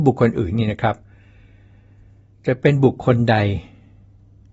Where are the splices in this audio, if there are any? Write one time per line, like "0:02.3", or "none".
none